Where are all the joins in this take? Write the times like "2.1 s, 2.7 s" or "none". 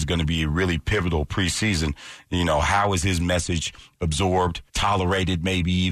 4.7 s